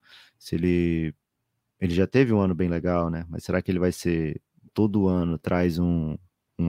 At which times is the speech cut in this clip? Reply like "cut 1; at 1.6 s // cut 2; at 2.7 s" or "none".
cut 1; at 4.7 s